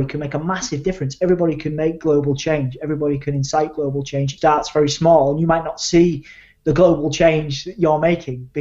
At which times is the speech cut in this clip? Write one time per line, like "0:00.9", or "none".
0:04.4